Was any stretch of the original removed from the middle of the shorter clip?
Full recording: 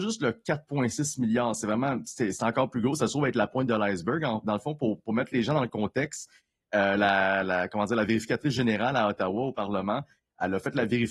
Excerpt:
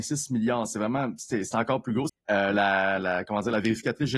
yes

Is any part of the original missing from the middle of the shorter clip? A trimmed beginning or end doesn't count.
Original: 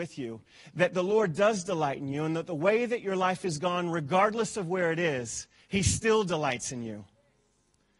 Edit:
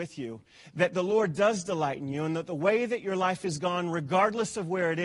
no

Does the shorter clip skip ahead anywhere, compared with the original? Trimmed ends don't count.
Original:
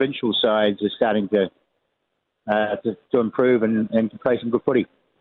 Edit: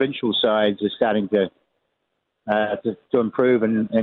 no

